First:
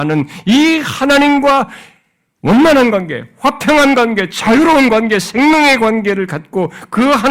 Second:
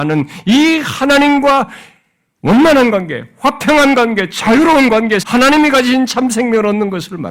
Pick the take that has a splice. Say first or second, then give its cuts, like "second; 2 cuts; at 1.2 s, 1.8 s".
second; 1 cut; at 5.2 s